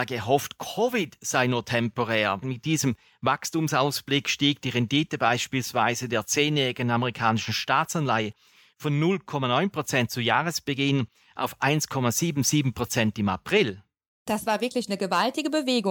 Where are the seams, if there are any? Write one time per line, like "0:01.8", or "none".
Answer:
0:02.4

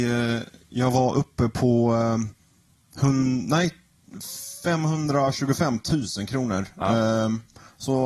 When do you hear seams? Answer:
none

